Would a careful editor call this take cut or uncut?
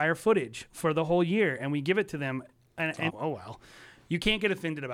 cut